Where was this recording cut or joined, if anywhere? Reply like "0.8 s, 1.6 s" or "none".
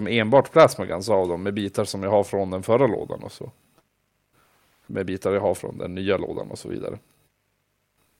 none